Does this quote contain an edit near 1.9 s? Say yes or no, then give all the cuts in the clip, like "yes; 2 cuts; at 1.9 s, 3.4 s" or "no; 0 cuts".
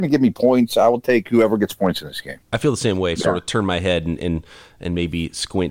no; 1 cut; at 3.2 s